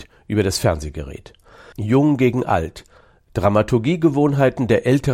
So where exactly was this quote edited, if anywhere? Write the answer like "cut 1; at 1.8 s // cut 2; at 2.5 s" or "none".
cut 1; at 1.7 s